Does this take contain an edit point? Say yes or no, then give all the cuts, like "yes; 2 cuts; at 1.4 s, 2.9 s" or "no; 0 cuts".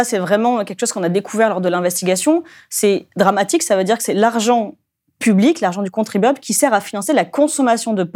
no; 0 cuts